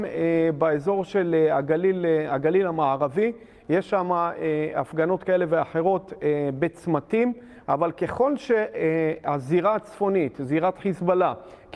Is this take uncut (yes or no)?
no